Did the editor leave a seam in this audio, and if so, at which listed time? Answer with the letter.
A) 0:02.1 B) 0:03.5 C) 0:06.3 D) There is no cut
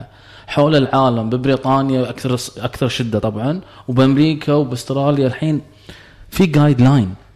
D